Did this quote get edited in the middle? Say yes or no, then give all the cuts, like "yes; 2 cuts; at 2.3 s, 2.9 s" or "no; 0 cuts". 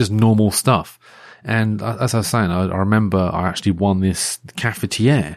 no; 0 cuts